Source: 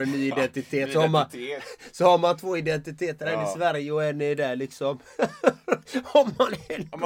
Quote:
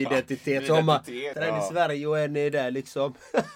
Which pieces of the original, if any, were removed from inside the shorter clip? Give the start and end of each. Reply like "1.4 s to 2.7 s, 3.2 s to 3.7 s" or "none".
1.6 s to 3.2 s